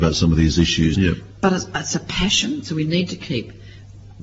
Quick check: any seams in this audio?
yes; 2 cuts; at 0.9 s, 2.6 s

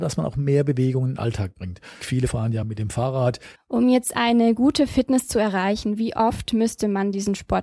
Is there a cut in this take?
yes; 2 cuts; at 2.0 s, 3.6 s

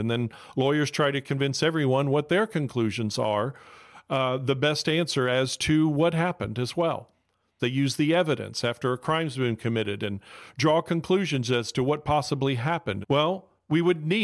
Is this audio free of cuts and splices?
no; 2 cuts; at 7.6 s, 13.0 s

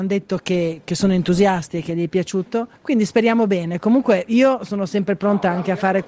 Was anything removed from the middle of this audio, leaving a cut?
yes; 1 cut; at 2.8 s

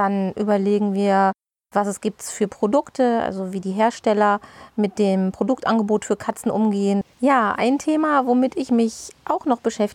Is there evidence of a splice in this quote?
yes; 1 cut; at 7.0 s

